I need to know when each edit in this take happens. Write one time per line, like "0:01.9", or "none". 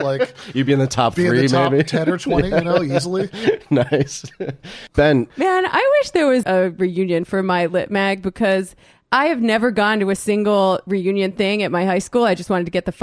0:05.3
0:06.4